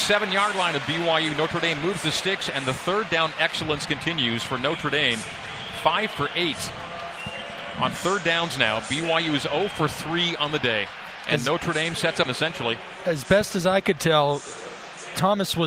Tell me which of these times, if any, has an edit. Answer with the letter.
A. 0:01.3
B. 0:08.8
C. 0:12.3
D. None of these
C